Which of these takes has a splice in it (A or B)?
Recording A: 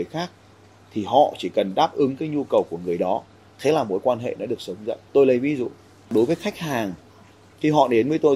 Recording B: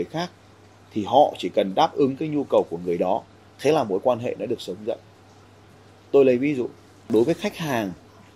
A